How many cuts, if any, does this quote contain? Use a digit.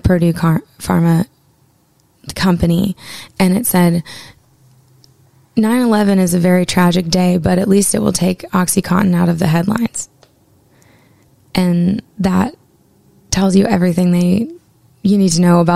1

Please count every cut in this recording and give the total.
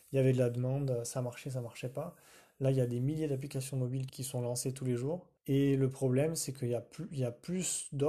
2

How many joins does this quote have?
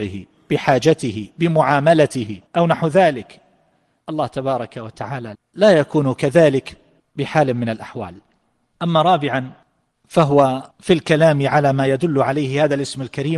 2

